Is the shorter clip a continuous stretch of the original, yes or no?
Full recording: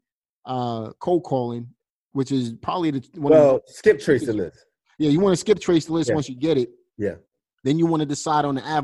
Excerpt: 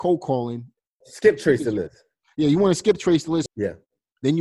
no